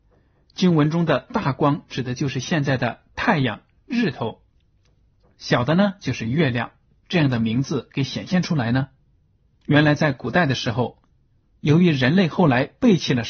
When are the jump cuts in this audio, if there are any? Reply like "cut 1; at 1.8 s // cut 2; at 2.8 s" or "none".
cut 1; at 7.0 s // cut 2; at 9.6 s